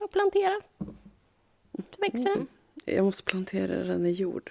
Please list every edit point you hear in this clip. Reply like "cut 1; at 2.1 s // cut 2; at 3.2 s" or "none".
cut 1; at 2.3 s